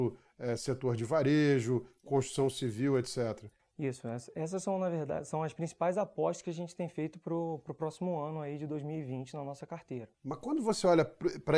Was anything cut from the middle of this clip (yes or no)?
no